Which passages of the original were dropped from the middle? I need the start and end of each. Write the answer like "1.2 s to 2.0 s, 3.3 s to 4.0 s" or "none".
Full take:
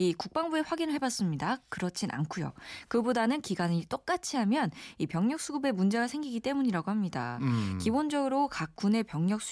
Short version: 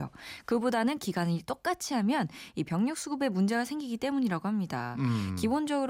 none